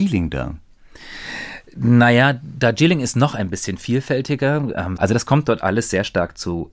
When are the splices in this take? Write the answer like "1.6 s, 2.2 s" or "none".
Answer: 5.0 s